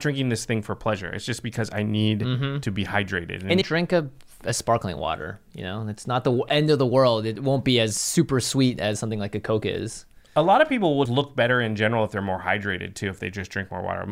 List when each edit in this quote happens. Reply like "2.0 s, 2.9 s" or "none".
3.6 s, 11.1 s

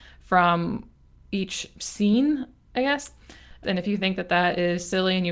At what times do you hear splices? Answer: 3.6 s

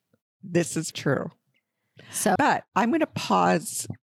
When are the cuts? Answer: 0.9 s, 2.4 s

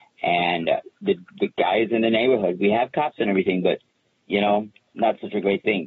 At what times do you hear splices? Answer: 1.3 s

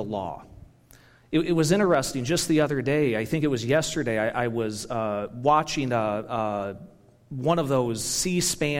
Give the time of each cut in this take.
none

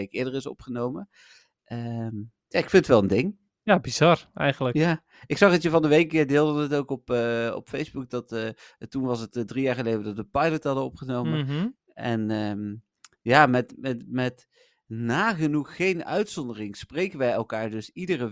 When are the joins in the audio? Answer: none

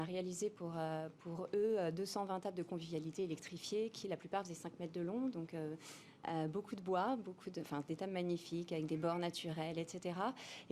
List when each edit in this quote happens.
none

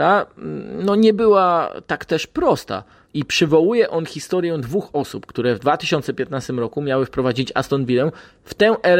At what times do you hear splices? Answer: 3.1 s

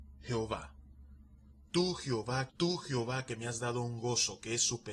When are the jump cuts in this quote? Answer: 2.5 s

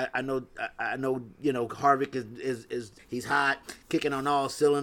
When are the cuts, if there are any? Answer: 3.0 s

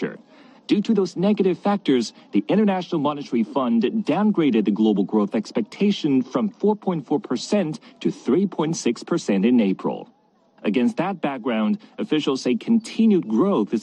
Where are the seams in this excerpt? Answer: none

